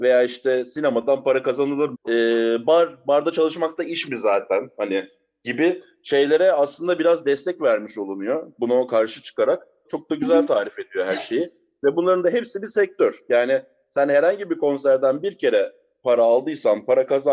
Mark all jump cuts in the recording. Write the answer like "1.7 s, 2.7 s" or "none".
1.9 s, 9.9 s